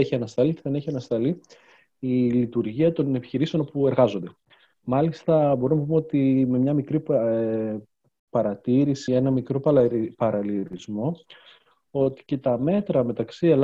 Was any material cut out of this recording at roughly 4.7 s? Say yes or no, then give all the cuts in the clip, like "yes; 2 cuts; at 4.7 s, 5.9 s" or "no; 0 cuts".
no; 1 cut; at 9.1 s